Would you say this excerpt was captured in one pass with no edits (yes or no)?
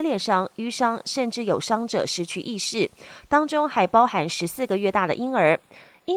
yes